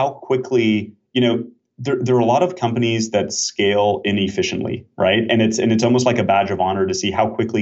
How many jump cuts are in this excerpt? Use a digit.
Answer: 1